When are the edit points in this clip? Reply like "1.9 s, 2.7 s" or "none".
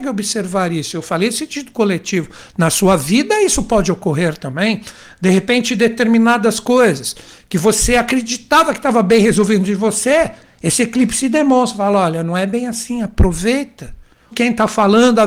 14.3 s